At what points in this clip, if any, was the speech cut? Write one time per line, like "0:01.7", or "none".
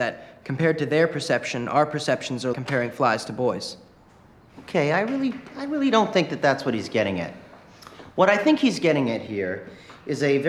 0:02.5